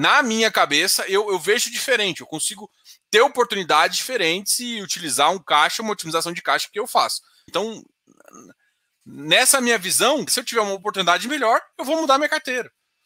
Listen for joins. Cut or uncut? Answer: cut